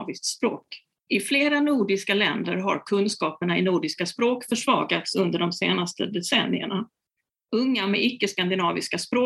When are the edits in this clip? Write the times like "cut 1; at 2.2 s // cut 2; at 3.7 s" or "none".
cut 1; at 1.1 s